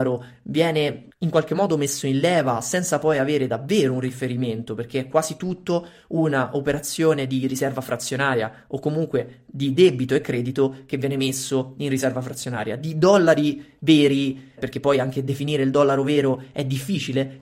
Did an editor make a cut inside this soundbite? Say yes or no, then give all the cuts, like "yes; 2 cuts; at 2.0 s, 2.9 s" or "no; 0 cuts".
yes; 1 cut; at 14.6 s